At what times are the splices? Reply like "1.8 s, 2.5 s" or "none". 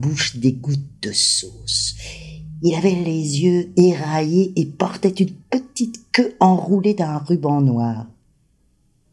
none